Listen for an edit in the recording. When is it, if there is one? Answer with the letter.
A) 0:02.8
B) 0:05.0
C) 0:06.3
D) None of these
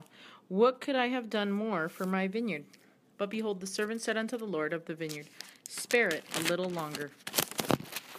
D